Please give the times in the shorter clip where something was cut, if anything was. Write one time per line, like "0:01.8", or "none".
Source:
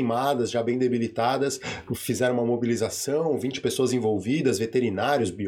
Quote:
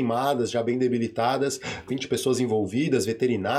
0:01.9